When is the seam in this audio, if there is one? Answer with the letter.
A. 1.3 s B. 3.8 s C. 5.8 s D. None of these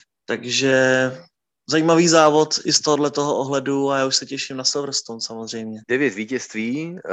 C